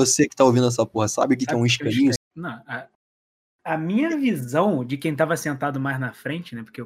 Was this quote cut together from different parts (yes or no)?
yes